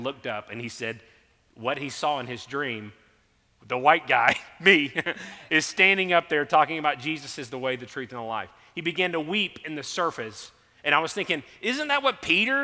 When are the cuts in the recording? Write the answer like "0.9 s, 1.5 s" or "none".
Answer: none